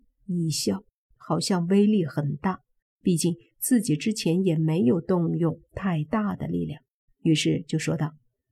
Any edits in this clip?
yes; 2 cuts; at 2.8 s, 7.1 s

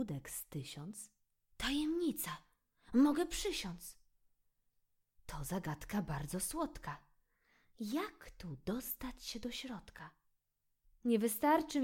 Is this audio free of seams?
yes; 0 cuts

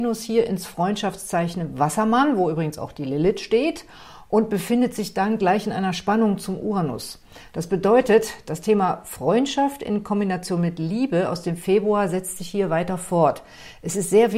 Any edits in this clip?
no; 0 cuts

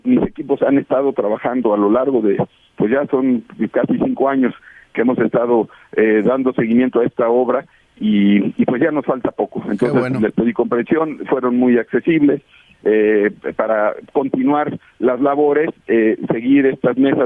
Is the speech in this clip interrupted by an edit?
no; 0 cuts

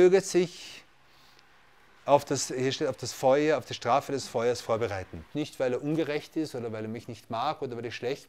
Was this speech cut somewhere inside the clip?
yes; 1 cut; at 5.3 s

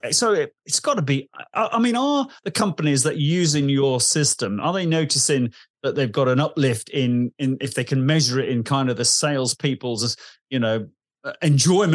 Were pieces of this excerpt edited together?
no; 0 cuts

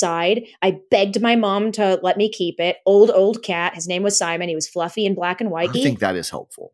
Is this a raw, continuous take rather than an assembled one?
no; 1 cut; at 5.7 s

